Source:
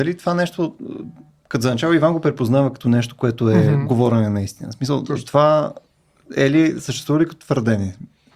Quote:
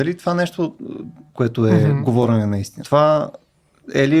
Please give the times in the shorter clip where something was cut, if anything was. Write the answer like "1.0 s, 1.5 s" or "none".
1.3 s, 2.8 s